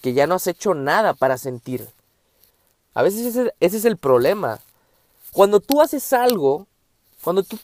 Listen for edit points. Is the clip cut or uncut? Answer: uncut